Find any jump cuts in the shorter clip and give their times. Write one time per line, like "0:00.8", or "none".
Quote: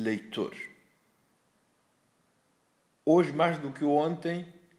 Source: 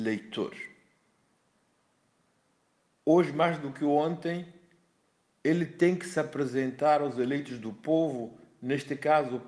none

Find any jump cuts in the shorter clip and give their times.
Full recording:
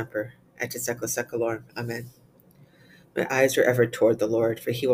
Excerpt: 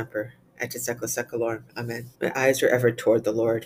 0:02.1

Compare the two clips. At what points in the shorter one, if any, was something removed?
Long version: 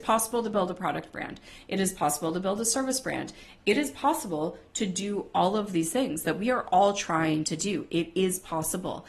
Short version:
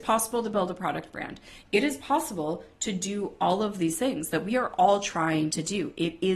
0:01.6

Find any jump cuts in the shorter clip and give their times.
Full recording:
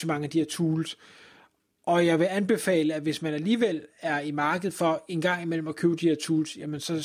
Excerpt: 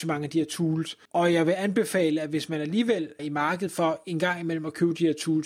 0:01.1
0:03.2

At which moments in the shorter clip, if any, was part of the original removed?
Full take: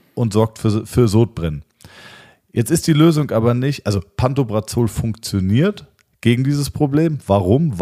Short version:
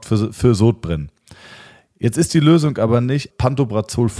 0:03.3

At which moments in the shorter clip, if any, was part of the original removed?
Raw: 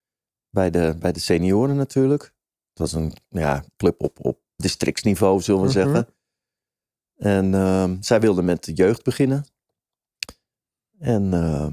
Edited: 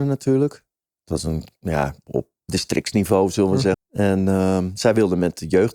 0:02.1
0:03.7

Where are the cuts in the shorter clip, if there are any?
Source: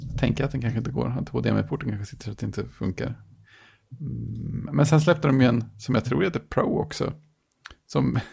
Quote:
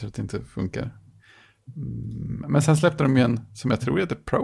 none

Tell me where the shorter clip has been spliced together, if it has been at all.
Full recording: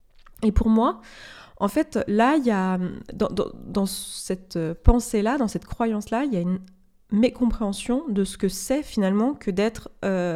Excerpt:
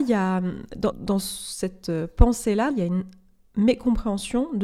0:00.9
0:02.7

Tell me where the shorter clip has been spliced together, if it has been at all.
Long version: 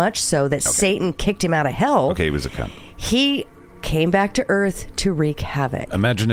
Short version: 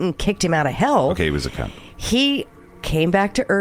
none

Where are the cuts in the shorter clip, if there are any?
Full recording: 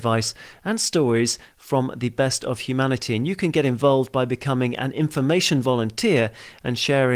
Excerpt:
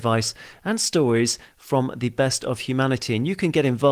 none

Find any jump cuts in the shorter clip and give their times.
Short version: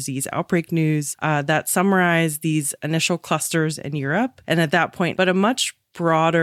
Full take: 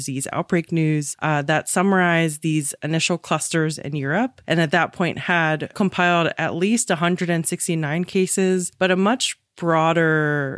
0:05.1

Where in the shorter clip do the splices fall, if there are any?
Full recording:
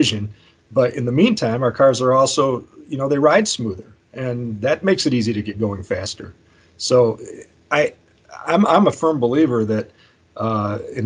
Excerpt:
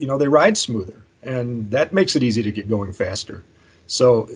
none

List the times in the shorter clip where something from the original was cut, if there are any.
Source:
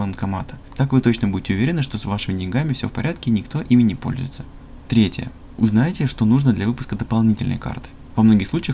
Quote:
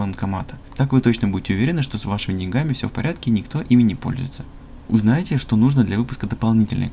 0:04.9

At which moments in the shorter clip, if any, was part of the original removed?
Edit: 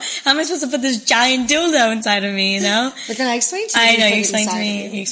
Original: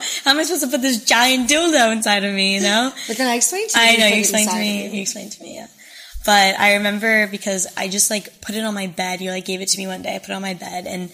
none

